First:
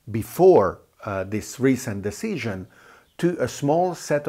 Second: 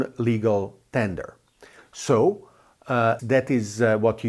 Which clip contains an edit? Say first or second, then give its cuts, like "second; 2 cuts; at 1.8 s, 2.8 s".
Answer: second; 1 cut; at 3.2 s